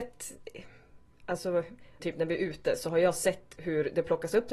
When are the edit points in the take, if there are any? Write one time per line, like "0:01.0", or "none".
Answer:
0:02.0